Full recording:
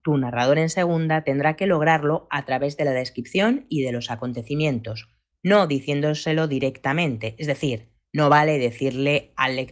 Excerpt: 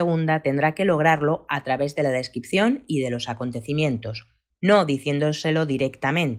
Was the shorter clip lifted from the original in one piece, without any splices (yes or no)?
yes